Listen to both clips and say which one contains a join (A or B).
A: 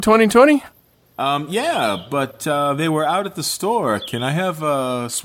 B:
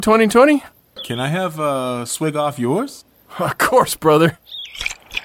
B